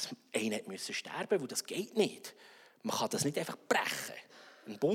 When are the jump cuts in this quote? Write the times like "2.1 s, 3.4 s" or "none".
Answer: none